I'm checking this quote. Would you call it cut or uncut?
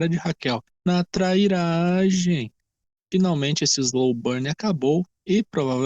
uncut